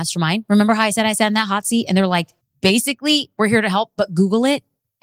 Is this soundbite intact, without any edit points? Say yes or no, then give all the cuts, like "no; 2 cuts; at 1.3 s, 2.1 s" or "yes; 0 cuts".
yes; 0 cuts